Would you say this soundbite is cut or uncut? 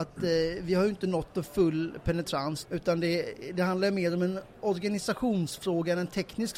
cut